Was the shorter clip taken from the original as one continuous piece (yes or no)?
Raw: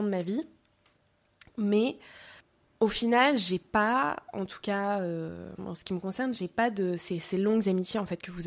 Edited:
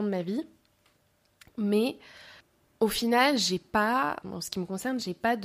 no